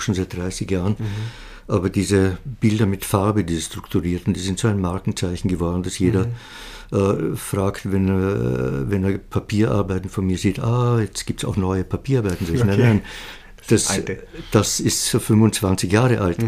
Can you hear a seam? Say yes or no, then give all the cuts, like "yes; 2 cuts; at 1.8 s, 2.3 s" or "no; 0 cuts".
no; 0 cuts